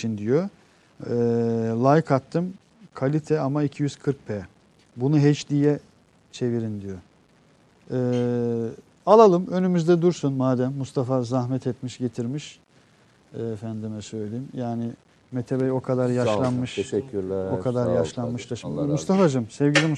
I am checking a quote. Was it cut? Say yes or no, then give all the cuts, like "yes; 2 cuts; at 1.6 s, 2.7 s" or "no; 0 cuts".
no; 0 cuts